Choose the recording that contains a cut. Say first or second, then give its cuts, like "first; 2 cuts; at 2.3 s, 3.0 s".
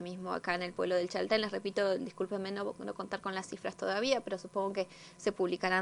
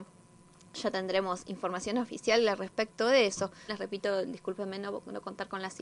second; 1 cut; at 3.7 s